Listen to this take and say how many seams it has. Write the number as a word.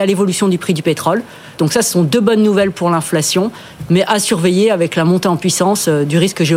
one